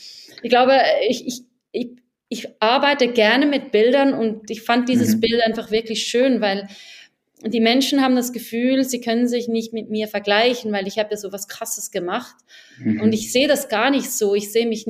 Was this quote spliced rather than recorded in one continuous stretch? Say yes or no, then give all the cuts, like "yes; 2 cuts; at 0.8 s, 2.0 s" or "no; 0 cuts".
no; 0 cuts